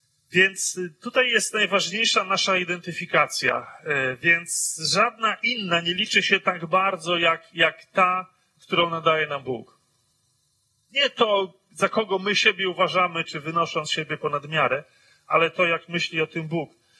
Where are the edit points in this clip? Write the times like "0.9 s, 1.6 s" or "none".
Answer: 13.2 s